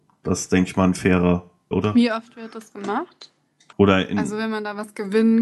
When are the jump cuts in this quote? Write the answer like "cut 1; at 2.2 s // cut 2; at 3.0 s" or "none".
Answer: cut 1; at 1.7 s // cut 2; at 3.7 s